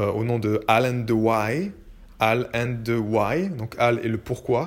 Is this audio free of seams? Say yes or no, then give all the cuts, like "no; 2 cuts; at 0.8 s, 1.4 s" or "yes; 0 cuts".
yes; 0 cuts